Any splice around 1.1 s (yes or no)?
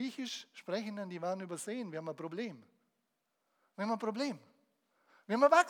no